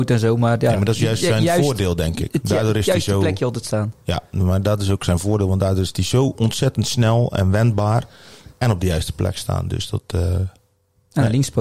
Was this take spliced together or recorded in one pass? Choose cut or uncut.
uncut